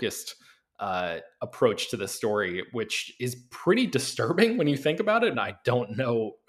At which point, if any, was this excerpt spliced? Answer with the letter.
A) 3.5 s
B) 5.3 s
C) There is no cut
B